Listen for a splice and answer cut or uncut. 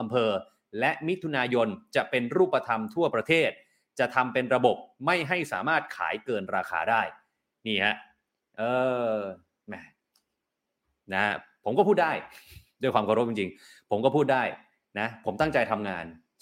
uncut